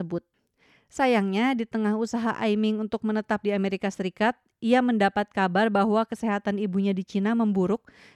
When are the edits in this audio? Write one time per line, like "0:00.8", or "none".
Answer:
none